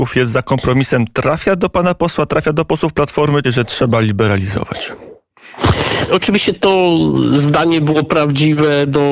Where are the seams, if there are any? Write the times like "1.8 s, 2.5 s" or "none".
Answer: 3.4 s, 6.1 s